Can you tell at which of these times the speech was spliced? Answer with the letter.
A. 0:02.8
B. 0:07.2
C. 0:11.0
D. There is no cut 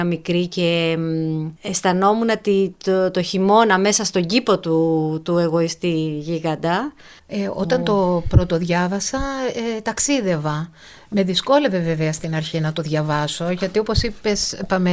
B